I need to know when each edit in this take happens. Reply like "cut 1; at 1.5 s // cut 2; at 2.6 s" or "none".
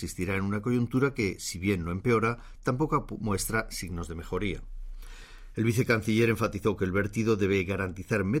cut 1; at 5.5 s

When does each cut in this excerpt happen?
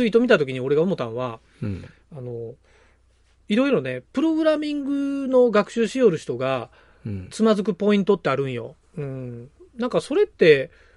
cut 1; at 8.8 s

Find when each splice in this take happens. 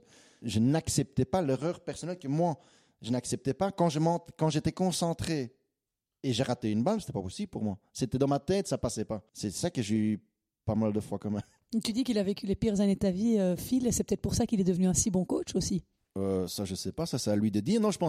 cut 1; at 9.3 s

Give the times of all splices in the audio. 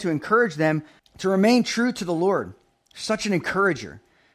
cut 1; at 1.0 s

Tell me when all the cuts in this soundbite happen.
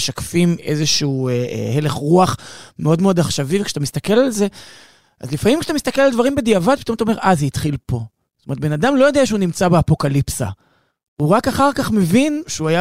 none

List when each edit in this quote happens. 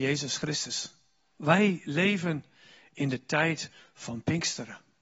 cut 1; at 1.3 s

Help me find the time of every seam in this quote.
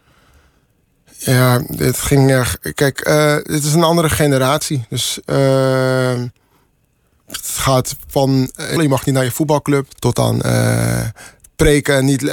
cut 1; at 8.8 s // cut 2; at 9.9 s

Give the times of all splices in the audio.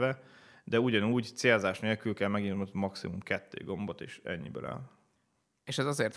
none

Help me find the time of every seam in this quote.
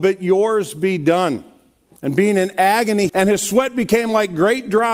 cut 1; at 2.0 s // cut 2; at 3.1 s

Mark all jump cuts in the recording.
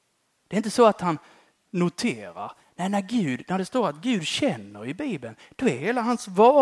none

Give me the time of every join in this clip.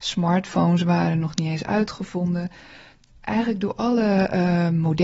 none

